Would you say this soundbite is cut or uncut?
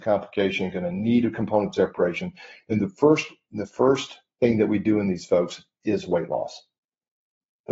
uncut